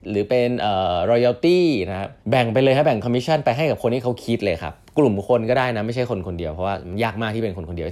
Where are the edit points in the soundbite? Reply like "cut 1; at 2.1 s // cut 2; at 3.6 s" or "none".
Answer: cut 1; at 2.2 s